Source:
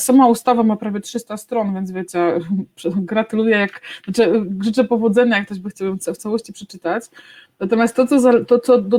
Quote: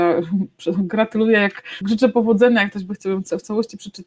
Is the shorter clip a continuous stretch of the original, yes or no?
no